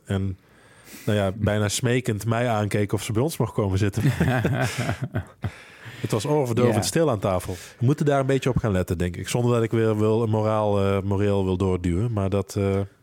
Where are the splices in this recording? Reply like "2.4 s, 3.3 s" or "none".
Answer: none